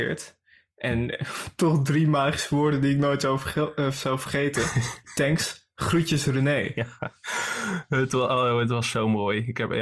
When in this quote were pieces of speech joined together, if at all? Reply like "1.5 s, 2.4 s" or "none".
none